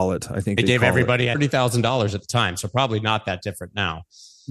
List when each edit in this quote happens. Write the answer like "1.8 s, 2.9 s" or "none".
1.3 s

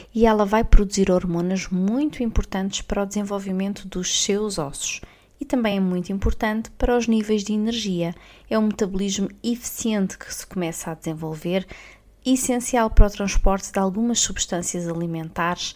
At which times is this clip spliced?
none

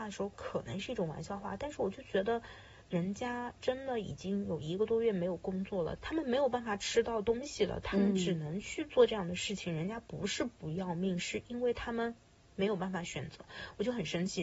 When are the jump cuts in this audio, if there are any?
6.0 s

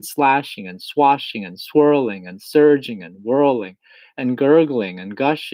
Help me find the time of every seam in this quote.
none

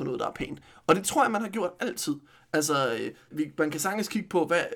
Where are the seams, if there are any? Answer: 3.3 s

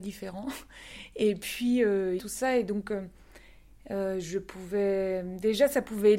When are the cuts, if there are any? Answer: 2.2 s

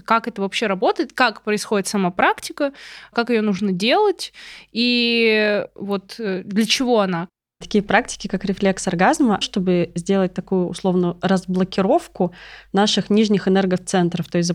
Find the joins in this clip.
9.4 s

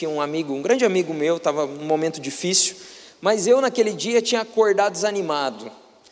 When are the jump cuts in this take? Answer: none

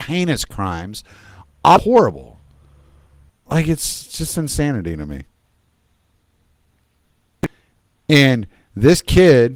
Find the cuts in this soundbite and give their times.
3.3 s

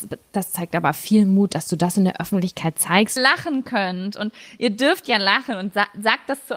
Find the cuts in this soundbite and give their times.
3.2 s

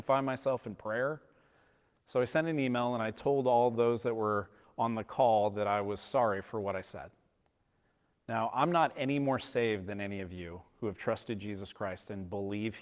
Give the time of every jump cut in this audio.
none

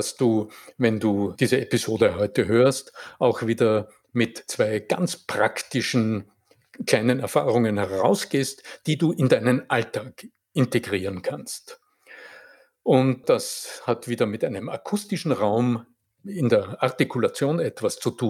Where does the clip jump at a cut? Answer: 13.2 s

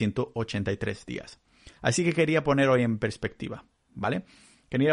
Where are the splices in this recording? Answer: 1.8 s

